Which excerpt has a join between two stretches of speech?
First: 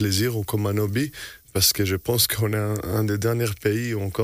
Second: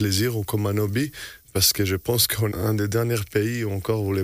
second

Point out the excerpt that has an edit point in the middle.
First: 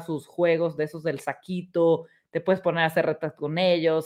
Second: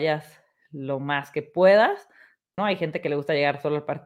second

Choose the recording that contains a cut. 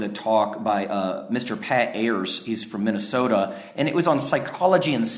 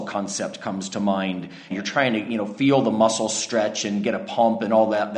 second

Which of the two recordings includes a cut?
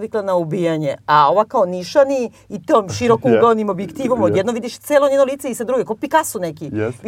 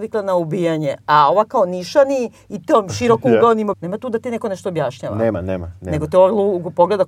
second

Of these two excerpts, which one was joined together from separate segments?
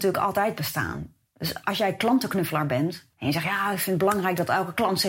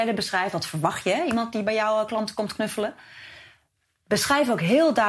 first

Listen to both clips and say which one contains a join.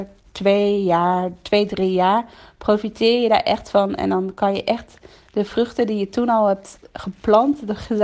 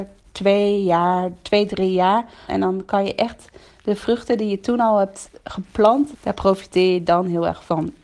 second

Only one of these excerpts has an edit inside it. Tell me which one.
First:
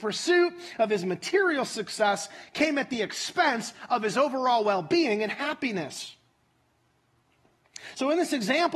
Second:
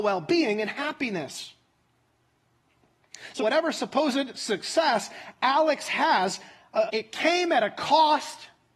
second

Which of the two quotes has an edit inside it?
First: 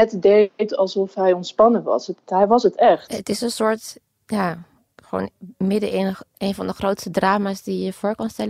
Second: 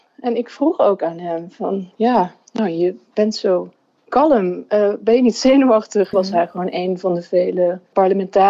second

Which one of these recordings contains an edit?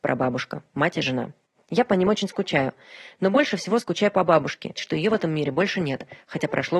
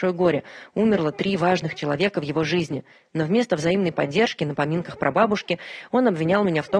first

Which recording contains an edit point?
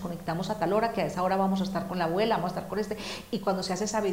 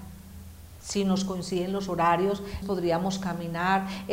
second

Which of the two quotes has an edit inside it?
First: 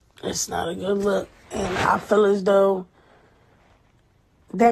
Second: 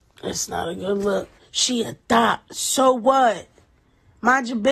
second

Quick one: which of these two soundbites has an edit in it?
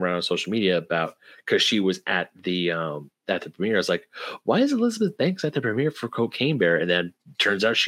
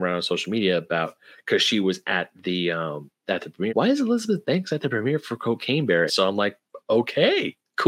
second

